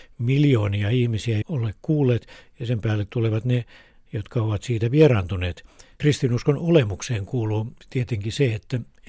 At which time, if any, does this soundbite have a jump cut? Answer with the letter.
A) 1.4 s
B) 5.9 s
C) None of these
A